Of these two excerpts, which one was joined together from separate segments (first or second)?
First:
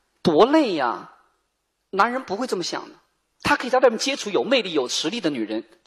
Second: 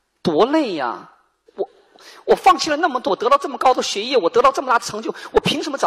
second